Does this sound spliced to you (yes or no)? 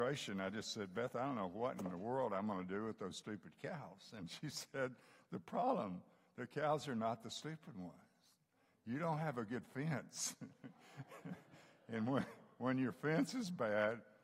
no